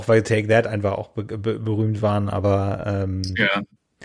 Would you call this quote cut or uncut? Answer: uncut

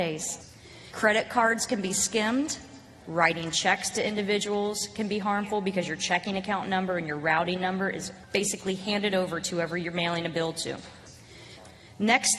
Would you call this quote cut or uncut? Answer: cut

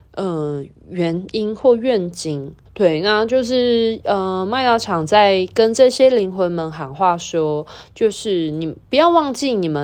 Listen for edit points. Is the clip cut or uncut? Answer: cut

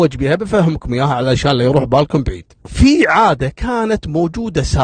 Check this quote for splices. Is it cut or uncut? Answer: cut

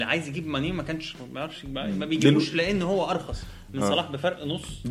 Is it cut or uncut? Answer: uncut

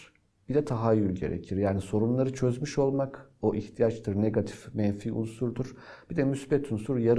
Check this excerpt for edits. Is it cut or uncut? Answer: uncut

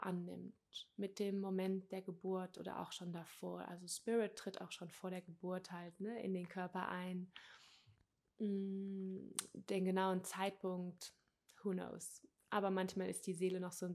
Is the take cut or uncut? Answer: uncut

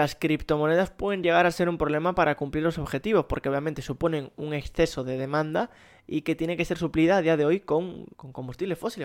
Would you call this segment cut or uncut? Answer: cut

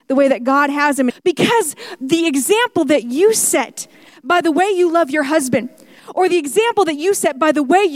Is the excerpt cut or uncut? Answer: cut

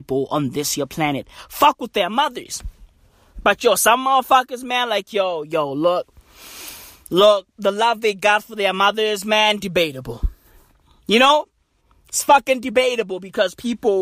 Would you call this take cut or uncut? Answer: uncut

